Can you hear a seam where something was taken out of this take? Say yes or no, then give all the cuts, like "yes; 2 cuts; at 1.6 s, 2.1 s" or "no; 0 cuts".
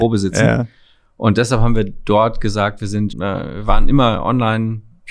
yes; 1 cut; at 3.1 s